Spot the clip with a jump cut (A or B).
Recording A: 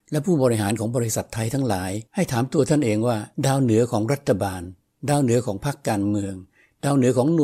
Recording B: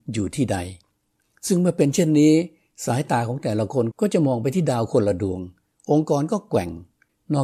A